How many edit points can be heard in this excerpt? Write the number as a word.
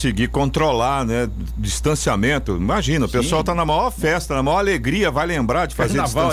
zero